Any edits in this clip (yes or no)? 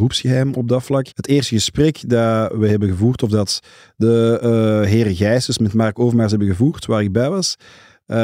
yes